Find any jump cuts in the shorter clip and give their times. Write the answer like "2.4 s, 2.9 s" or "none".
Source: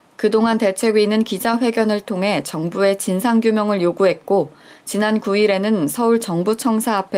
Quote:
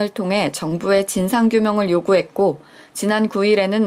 none